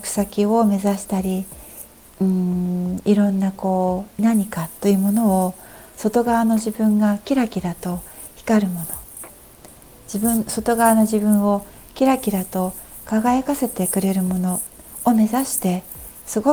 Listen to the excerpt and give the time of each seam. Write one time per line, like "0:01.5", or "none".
0:04.2